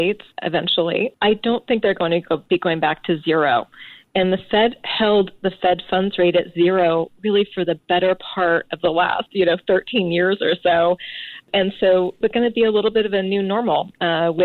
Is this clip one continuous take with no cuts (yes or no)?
yes